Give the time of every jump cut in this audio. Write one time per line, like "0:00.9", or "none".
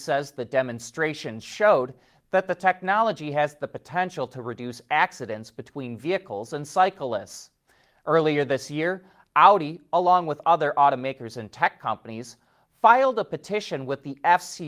none